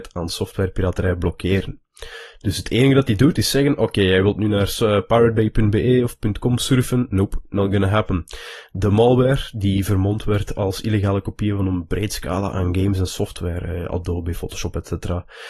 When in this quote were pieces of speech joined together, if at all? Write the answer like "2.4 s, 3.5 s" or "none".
none